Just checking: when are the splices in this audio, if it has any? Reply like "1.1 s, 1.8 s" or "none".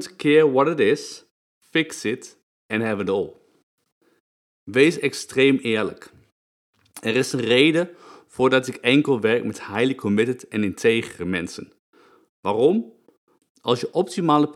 1.4 s